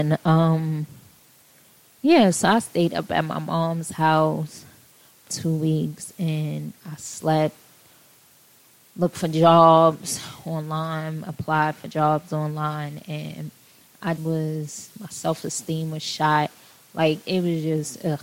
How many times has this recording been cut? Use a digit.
2